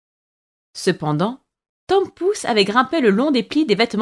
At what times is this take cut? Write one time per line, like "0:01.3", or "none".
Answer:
0:01.8